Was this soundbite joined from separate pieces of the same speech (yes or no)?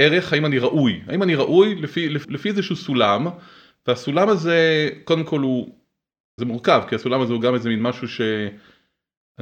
yes